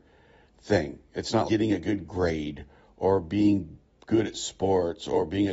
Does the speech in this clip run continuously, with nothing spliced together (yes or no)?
no